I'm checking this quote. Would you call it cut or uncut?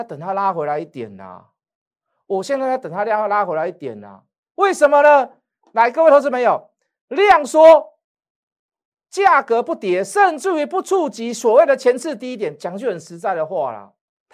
uncut